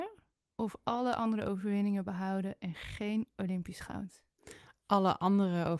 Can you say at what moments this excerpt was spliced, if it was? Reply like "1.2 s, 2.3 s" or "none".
none